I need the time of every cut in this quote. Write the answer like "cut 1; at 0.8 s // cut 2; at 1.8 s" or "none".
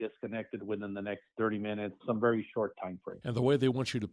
cut 1; at 2.0 s